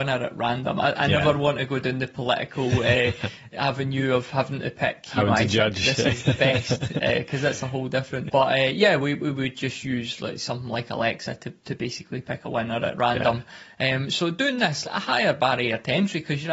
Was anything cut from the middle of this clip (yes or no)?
yes